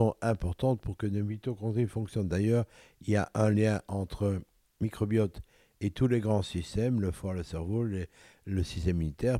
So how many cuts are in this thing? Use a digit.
0